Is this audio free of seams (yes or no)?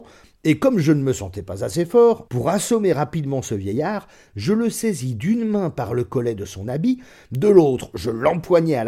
no